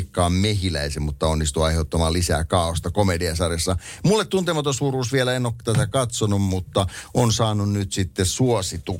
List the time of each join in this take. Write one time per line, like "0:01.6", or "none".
none